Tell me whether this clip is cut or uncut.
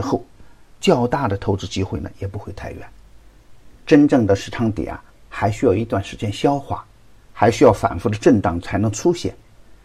uncut